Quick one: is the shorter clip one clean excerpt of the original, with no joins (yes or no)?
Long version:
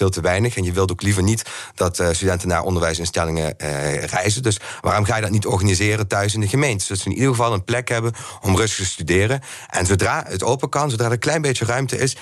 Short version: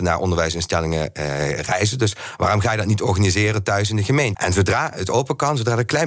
no